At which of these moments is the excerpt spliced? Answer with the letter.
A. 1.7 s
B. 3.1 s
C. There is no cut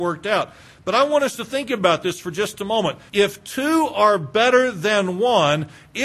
B